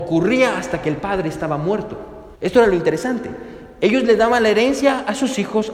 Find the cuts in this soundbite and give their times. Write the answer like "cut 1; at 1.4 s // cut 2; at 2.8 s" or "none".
cut 1; at 2.3 s